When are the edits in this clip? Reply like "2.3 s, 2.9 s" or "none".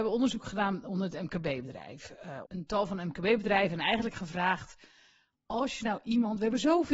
2.5 s